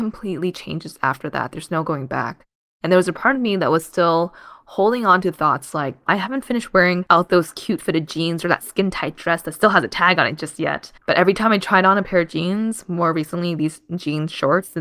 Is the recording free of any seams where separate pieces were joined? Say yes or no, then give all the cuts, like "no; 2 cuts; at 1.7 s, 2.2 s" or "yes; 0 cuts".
no; 2 cuts; at 6.1 s, 11.0 s